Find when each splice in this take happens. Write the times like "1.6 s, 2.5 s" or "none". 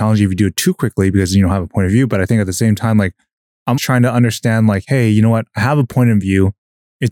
3.8 s